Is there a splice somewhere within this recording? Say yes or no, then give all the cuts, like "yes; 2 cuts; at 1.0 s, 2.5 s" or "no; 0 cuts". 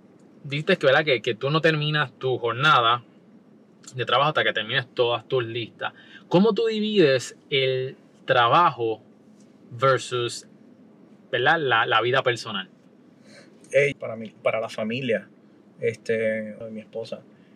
yes; 2 cuts; at 13.9 s, 16.6 s